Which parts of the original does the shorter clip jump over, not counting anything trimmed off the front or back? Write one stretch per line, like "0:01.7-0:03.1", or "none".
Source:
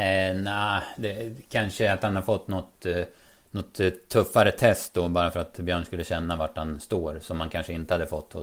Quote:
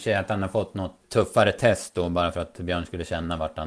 0:02.8-0:04.0